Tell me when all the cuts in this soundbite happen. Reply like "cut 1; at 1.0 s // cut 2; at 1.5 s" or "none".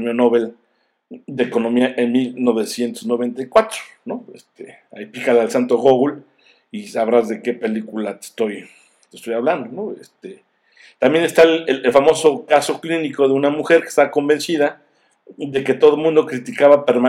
none